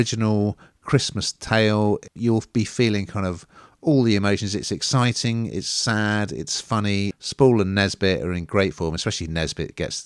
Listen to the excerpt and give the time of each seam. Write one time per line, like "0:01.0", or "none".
0:07.1